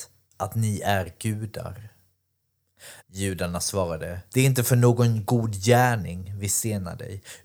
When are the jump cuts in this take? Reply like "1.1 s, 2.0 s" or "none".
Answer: 3.0 s, 4.3 s